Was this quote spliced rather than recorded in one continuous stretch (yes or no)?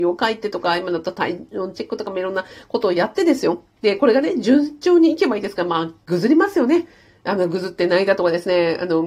yes